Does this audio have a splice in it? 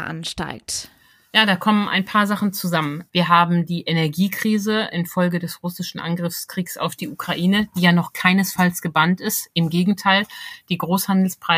yes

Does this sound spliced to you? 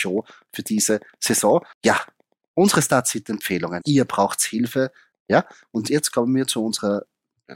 yes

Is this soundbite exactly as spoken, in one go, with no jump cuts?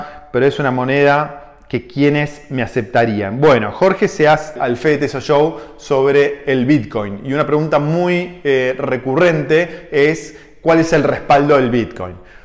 no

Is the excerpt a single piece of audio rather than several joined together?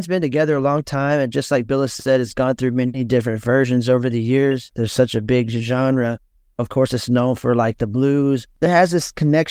no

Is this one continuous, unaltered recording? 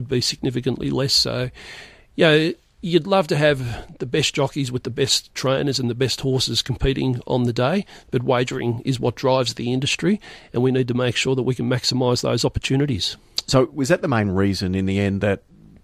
yes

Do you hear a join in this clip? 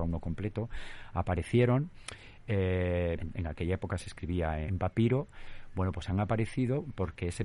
yes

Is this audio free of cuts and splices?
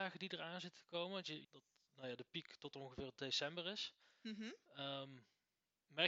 no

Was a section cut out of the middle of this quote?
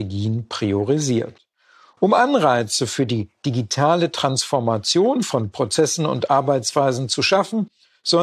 no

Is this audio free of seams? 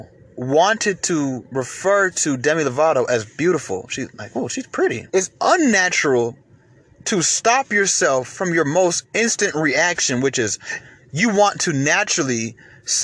no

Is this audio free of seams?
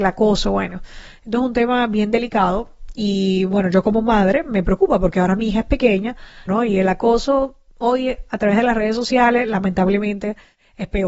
no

